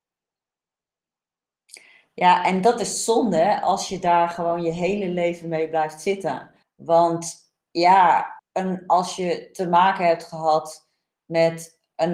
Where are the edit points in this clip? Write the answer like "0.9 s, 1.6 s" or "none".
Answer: 6.6 s, 8.4 s